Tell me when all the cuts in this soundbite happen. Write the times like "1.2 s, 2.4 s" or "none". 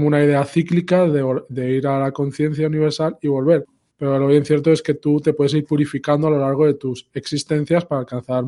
none